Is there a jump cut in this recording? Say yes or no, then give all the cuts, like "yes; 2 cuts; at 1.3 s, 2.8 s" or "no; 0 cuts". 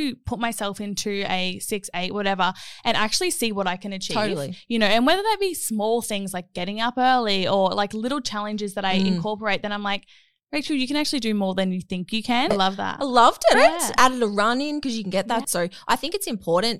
yes; 3 cuts; at 12.5 s, 13.5 s, 15.4 s